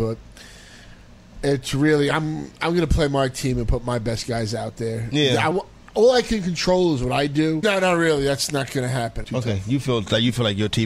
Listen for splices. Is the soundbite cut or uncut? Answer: cut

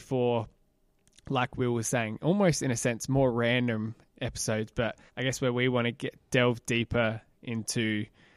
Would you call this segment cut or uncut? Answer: cut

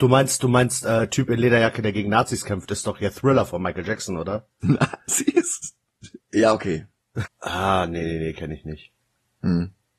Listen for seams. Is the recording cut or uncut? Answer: cut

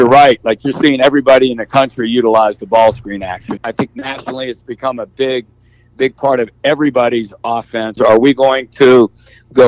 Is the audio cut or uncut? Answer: cut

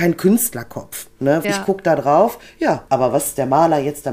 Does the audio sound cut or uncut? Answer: cut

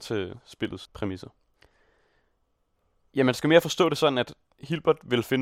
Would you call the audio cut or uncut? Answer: uncut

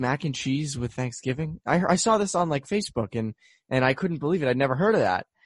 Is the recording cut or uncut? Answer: uncut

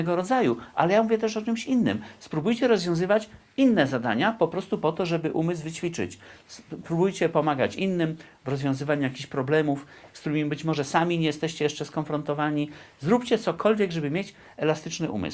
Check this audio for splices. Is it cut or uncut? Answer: uncut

